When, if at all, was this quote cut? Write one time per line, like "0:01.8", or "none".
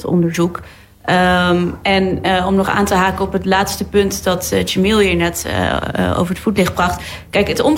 0:02.6

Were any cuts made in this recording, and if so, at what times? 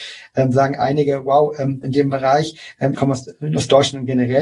0:01.8
0:02.9

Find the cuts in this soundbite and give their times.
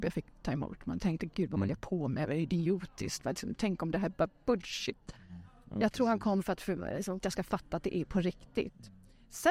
0:07.2

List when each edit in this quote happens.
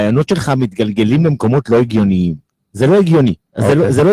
none

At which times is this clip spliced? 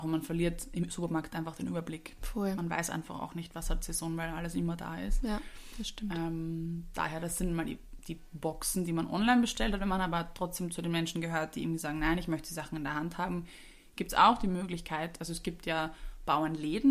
none

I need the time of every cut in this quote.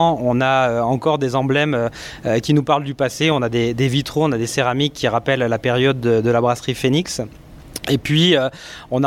none

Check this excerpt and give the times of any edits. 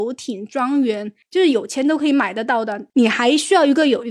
none

